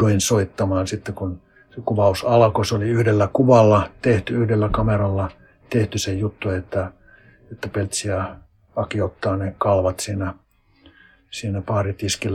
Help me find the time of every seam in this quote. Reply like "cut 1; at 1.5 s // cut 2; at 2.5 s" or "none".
none